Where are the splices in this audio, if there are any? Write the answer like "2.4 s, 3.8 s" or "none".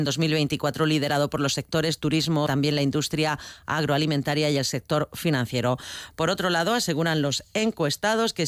2.5 s

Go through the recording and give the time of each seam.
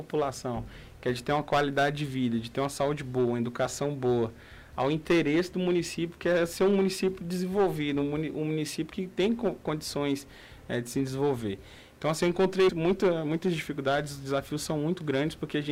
12.7 s

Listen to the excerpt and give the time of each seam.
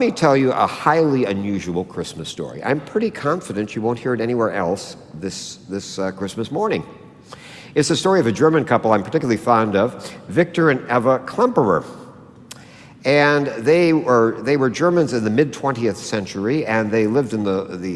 none

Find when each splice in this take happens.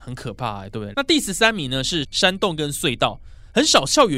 0.9 s, 2.0 s

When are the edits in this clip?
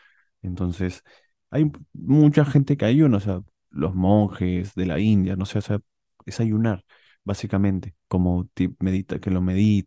3.6 s

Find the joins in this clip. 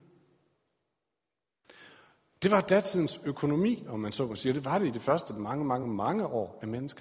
5.8 s

